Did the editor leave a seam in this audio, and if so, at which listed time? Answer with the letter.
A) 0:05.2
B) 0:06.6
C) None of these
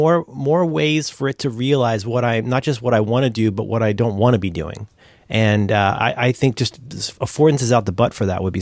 C